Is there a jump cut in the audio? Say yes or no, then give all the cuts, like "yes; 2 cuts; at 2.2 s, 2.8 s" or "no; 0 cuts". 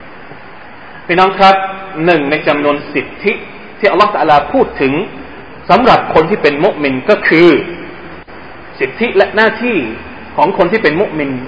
no; 0 cuts